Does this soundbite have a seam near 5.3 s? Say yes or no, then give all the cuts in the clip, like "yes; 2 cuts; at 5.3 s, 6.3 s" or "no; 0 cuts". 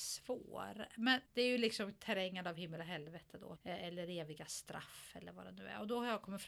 no; 2 cuts; at 1.3 s, 3.6 s